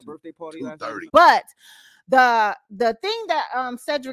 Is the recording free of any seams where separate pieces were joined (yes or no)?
no